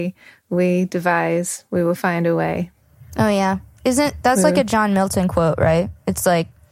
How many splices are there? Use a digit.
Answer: 0